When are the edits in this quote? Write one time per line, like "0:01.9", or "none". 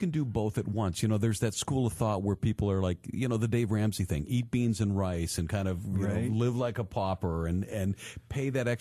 none